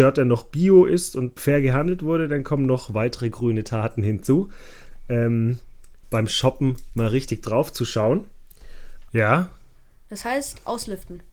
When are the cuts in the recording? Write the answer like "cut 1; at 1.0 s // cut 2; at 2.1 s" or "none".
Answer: cut 1; at 1.4 s // cut 2; at 6.0 s // cut 3; at 9.1 s

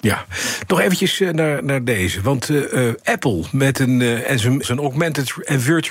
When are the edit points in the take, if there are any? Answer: cut 1; at 4.6 s

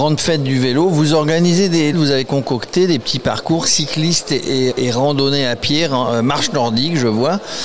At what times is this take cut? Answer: cut 1; at 1.9 s // cut 2; at 4.7 s

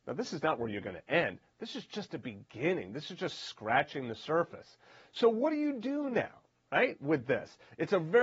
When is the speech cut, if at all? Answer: none

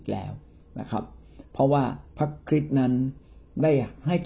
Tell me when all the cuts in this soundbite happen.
none

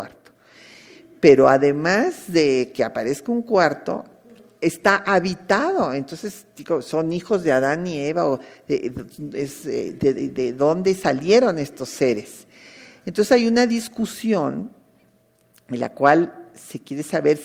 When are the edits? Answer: none

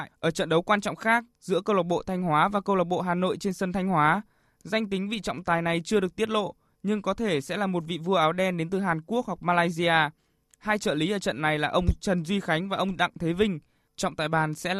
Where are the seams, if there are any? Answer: none

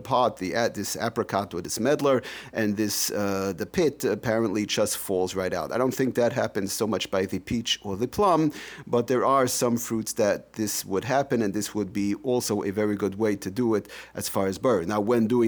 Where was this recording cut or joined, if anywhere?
none

